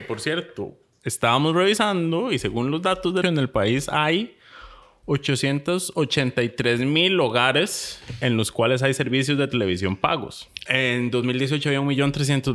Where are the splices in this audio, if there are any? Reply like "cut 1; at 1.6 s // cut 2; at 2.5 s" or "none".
cut 1; at 3.2 s // cut 2; at 10.7 s